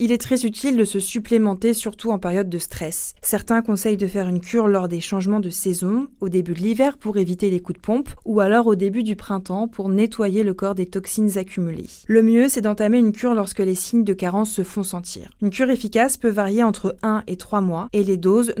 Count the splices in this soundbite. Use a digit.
1